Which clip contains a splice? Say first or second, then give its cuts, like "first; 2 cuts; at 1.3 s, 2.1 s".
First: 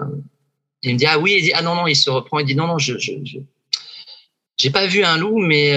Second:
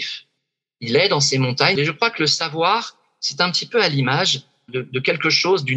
second; 2 cuts; at 1.7 s, 4.7 s